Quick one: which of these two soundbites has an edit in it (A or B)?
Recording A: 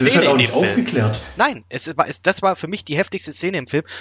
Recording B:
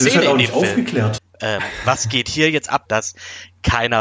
B